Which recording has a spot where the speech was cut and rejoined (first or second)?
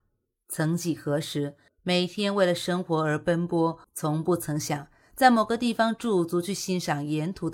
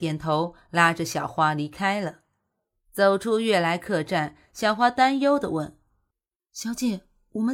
first